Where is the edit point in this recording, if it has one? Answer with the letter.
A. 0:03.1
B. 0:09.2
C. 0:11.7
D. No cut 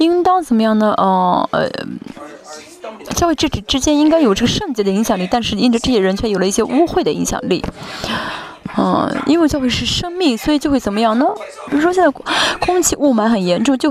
C